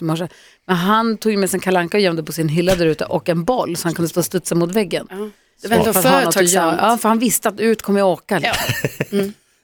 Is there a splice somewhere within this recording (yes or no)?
no